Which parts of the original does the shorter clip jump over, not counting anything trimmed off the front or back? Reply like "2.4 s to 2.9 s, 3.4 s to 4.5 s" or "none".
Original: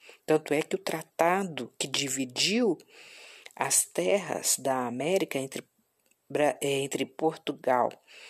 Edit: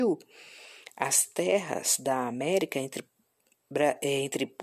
none